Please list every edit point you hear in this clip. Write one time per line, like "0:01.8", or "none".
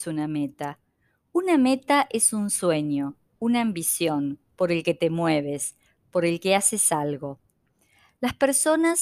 0:04.5
0:06.0

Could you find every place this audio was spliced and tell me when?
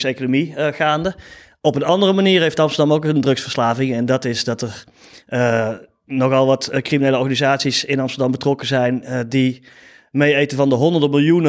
none

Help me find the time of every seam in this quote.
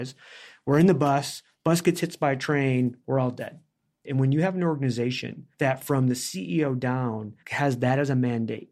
0:04.1
0:05.5
0:07.4

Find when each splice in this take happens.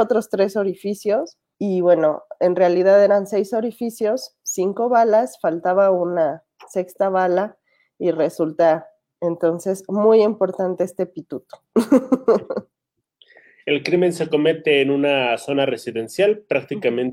0:01.5

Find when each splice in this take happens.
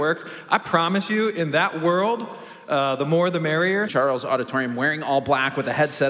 0:03.9

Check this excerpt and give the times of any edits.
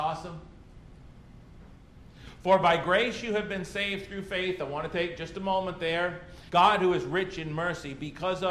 0:06.5

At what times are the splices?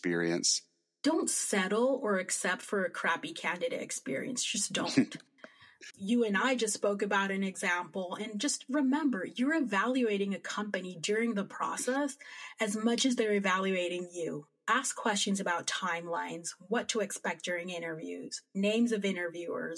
none

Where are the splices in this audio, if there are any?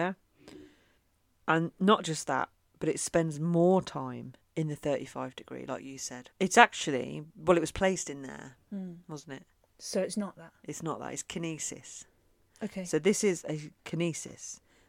0:06.3
0:08.6

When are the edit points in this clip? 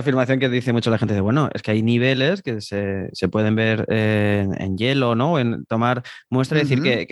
none

